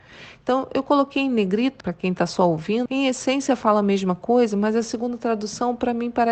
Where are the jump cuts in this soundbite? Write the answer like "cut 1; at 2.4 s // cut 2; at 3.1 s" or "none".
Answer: cut 1; at 1.8 s // cut 2; at 2.9 s